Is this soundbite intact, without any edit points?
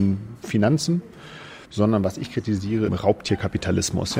no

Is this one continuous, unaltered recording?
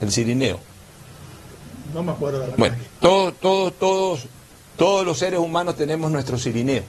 yes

